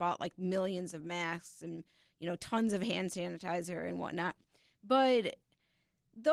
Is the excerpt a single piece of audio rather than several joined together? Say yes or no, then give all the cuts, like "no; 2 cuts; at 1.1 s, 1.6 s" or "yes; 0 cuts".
yes; 0 cuts